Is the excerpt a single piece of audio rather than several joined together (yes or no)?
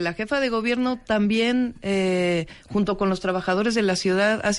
yes